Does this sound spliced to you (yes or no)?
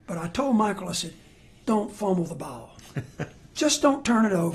yes